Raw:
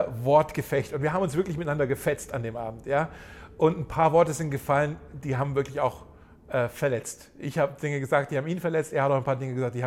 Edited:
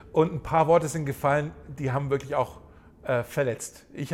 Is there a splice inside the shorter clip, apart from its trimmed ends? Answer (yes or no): no